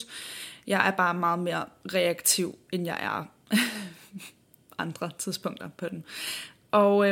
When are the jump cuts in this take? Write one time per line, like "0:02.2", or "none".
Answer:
none